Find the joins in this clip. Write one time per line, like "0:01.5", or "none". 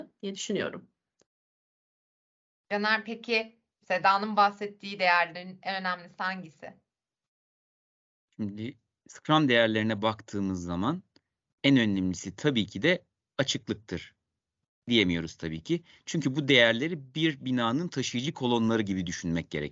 none

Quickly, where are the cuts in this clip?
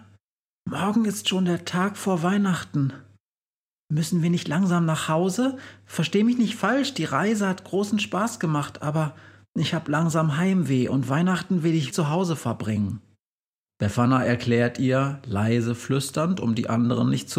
0:11.9

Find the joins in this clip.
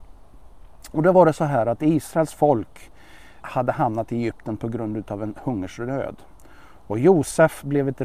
0:03.4

